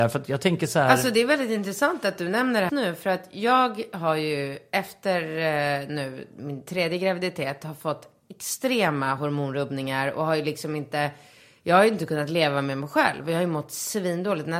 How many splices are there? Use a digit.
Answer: 1